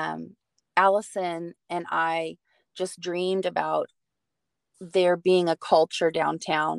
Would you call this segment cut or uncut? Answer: uncut